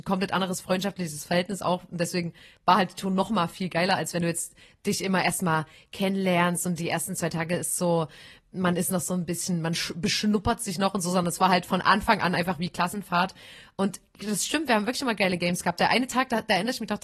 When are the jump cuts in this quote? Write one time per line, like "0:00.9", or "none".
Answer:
none